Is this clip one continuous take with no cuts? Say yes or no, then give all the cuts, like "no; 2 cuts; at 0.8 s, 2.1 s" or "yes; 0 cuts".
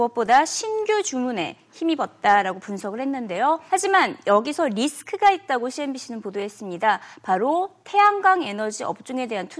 no; 1 cut; at 3.7 s